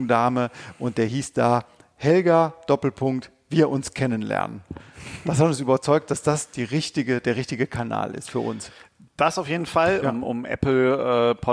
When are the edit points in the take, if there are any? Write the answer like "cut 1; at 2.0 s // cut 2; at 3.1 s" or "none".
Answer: cut 1; at 10.0 s